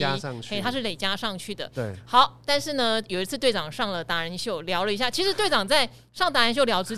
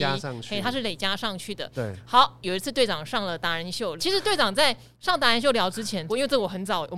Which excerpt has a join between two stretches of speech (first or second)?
second